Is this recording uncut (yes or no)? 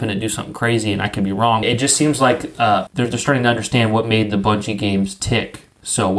no